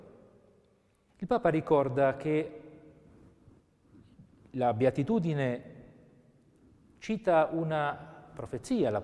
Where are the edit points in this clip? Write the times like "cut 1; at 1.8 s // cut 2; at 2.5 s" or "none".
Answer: cut 1; at 1.1 s

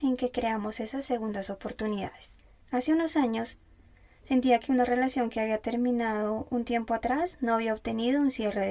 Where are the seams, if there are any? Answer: cut 1; at 2.6 s

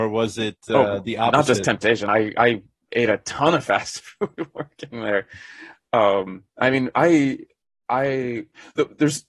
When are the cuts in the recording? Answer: none

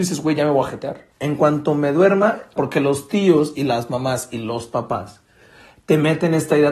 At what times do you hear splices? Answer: cut 1; at 1.1 s // cut 2; at 2.6 s

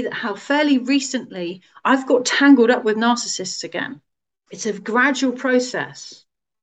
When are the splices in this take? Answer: cut 1; at 4.5 s

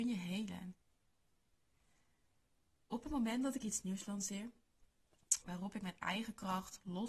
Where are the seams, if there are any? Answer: cut 1; at 5.4 s

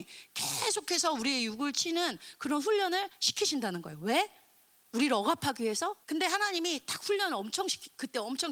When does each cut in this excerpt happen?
cut 1; at 6.0 s

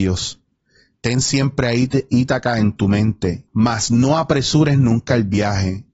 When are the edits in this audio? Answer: cut 1; at 3.5 s

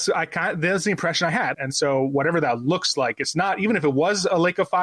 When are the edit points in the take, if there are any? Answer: cut 1; at 1.5 s

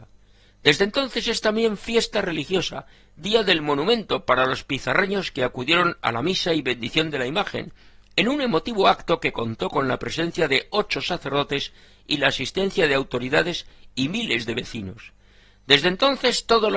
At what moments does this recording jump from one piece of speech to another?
none

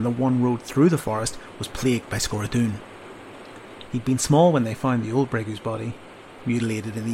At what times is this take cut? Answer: cut 1; at 3.9 s

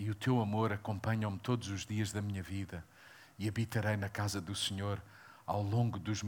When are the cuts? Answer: none

